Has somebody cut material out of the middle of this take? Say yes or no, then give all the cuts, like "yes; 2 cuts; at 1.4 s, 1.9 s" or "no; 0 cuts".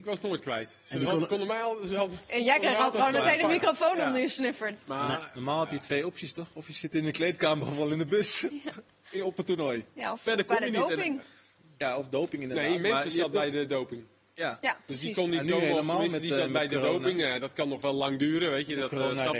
no; 0 cuts